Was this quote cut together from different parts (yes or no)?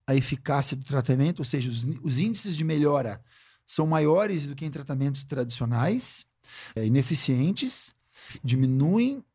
yes